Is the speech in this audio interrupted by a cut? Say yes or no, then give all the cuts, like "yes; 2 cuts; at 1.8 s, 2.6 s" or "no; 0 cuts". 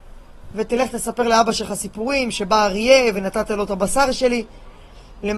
no; 0 cuts